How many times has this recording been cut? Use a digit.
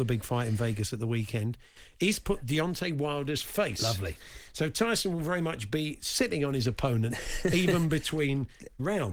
0